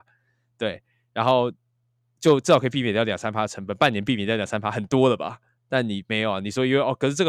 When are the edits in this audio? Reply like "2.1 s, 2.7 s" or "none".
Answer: none